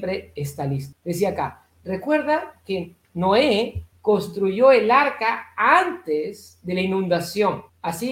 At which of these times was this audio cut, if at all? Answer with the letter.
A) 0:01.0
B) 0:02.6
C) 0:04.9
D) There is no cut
D